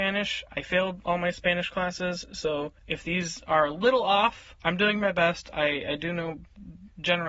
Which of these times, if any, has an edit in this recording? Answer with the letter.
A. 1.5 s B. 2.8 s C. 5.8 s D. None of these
B